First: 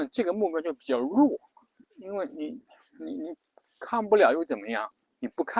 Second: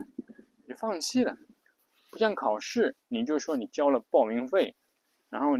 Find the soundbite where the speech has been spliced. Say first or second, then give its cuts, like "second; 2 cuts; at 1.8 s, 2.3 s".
first; 1 cut; at 1.8 s